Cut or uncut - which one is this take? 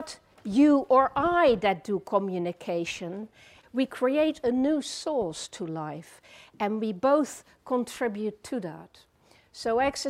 cut